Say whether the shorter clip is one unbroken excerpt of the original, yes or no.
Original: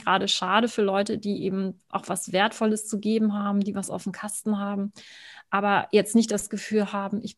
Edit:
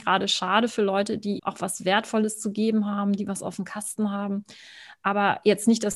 no